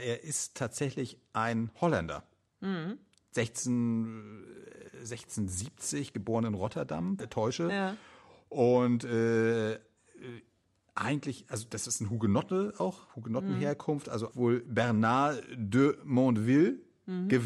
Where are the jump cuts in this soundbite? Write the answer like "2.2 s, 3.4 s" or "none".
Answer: 7.2 s, 14.3 s